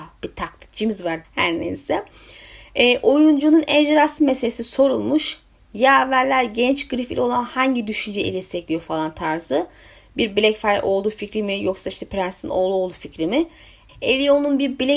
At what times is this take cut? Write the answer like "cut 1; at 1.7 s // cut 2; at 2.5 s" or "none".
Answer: cut 1; at 1.2 s // cut 2; at 13.9 s